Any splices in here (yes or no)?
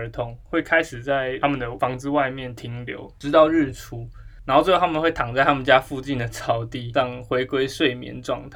no